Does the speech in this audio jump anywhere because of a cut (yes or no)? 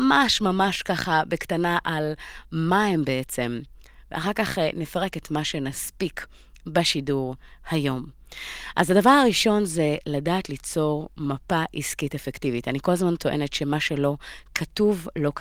no